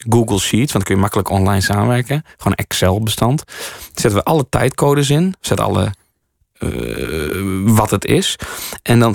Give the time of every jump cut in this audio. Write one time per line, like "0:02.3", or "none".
none

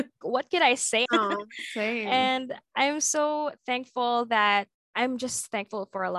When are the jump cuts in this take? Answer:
0:01.1

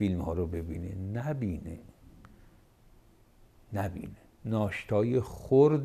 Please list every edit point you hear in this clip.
none

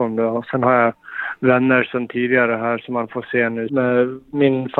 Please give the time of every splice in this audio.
0:03.7

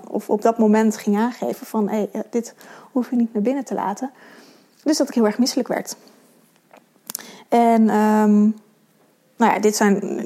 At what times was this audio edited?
none

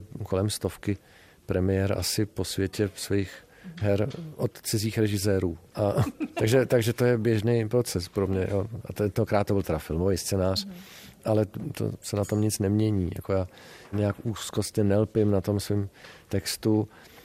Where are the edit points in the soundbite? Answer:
0:05.7
0:13.9

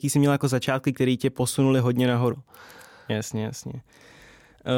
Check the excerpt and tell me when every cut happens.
0:02.3

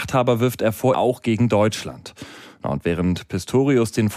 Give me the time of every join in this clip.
0:00.9

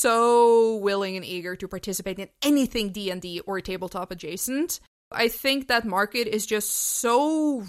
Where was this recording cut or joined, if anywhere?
none

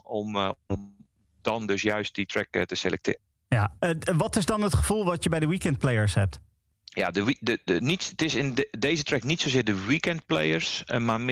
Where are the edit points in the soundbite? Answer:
none

